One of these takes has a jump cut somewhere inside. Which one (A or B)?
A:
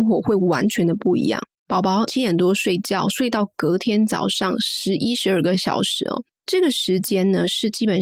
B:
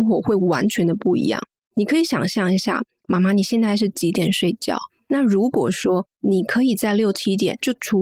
A